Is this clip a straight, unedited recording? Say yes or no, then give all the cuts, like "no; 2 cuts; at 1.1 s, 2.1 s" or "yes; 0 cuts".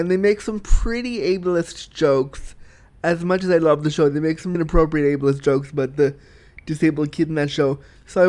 no; 1 cut; at 4.5 s